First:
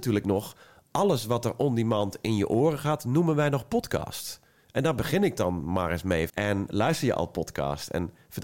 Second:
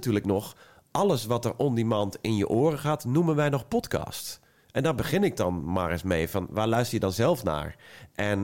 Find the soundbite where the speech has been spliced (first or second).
first